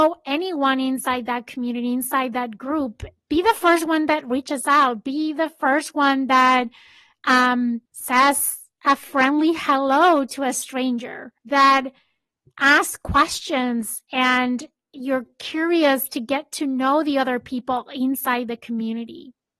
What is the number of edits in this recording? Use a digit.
2